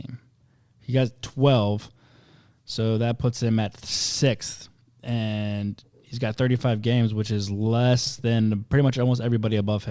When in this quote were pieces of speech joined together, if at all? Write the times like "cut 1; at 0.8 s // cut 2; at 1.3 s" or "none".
none